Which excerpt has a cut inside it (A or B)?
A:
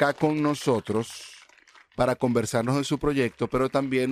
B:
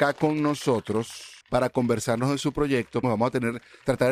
B